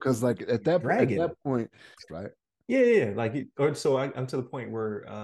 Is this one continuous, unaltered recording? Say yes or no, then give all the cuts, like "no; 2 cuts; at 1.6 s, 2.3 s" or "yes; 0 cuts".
no; 1 cut; at 2.1 s